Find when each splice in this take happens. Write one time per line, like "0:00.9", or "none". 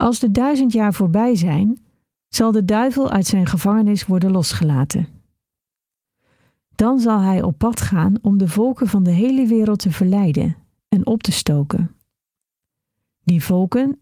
none

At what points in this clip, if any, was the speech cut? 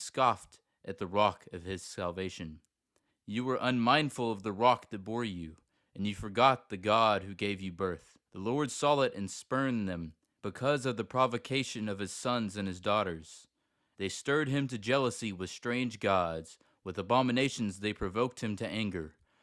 0:03.1
0:08.3
0:13.9

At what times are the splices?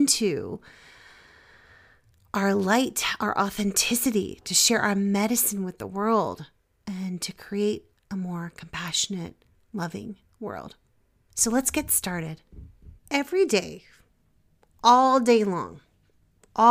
0:13.0

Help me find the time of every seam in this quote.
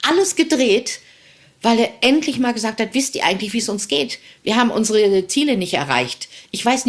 none

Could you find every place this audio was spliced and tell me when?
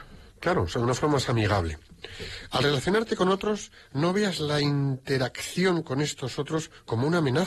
none

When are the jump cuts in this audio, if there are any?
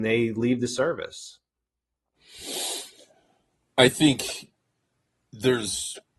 none

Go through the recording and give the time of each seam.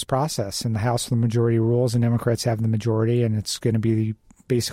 none

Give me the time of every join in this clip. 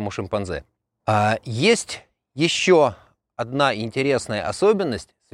0:01.0

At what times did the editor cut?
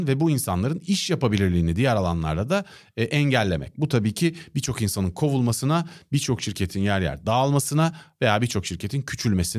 none

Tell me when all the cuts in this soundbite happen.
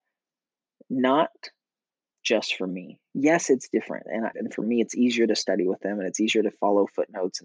0:04.3

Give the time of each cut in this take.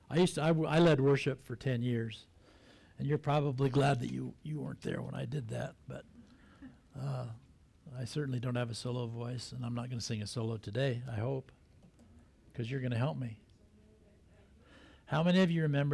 none

